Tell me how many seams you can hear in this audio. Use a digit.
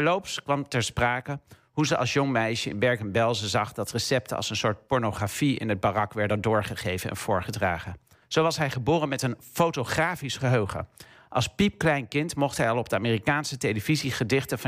1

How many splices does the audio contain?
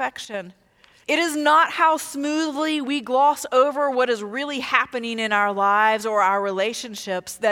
1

